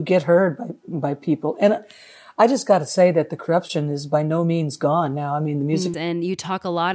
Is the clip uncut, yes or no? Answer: no